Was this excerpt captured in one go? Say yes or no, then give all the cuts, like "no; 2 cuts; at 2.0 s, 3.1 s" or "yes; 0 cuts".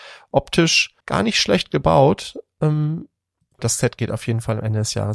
no; 2 cuts; at 1.0 s, 3.6 s